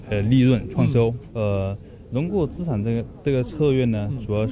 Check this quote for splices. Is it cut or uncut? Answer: cut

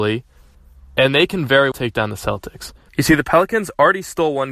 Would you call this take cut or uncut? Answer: cut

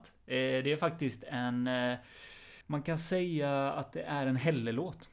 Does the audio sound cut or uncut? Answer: cut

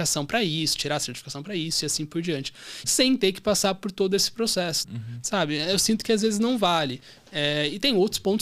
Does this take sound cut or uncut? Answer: cut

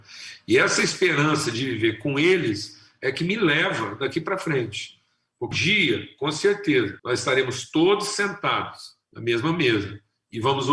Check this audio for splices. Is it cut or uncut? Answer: cut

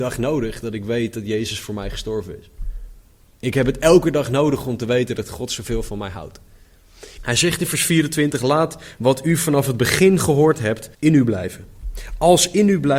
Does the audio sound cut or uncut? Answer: cut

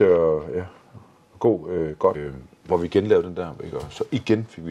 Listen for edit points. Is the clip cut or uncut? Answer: cut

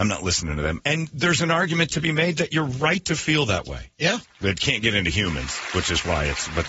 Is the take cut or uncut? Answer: cut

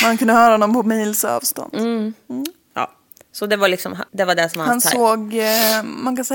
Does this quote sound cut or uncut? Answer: cut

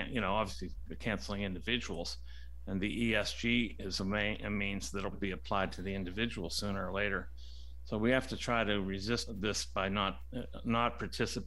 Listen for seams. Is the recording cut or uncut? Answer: cut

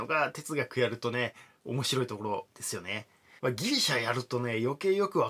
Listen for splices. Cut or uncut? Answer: cut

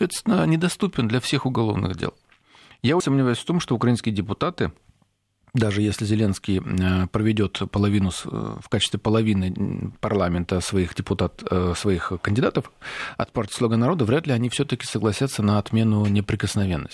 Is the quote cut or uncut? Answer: cut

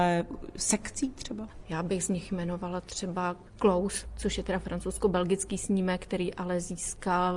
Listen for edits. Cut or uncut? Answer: cut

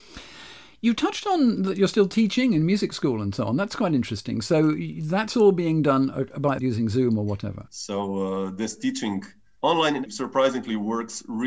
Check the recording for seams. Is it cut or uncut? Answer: cut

